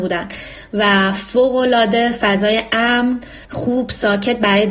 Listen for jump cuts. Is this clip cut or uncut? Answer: cut